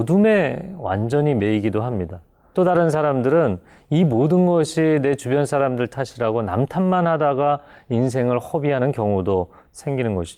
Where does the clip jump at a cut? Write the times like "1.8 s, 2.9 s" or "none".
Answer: 2.5 s